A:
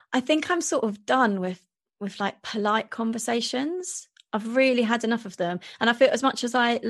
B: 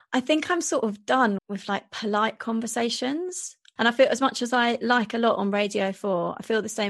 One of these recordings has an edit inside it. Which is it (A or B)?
B